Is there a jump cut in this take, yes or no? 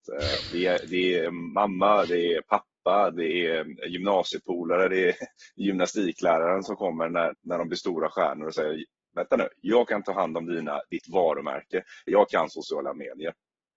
yes